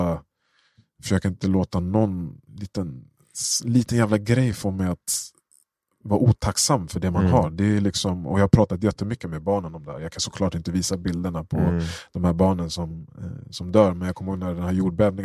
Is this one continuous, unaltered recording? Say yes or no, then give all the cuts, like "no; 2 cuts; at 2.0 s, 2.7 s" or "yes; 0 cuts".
no; 1 cut; at 2.5 s